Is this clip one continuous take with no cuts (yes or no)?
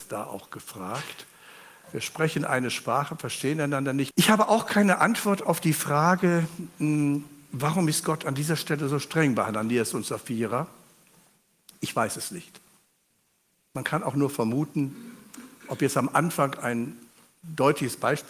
no